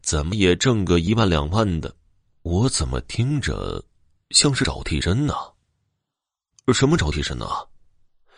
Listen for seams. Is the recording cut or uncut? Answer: cut